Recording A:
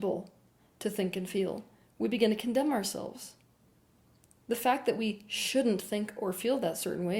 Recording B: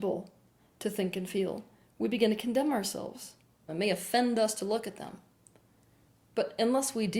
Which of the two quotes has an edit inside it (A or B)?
B